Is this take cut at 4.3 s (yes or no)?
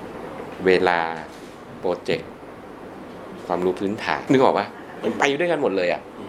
yes